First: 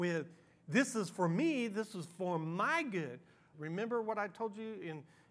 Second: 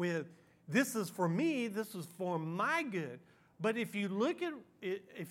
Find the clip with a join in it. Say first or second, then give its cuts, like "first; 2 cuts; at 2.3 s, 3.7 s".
first; 1 cut; at 3.5 s